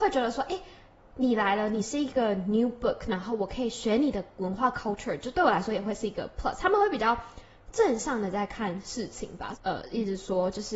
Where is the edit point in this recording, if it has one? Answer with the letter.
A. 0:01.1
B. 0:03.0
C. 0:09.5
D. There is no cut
C